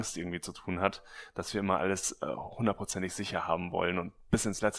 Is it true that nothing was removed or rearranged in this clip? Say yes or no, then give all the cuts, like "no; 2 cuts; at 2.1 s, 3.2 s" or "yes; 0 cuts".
yes; 0 cuts